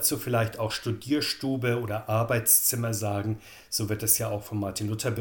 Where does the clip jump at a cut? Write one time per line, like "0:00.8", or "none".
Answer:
none